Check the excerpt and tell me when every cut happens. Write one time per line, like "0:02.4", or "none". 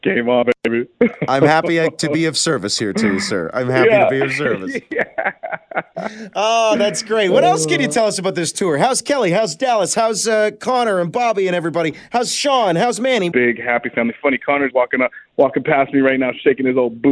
0:13.3
0:14.7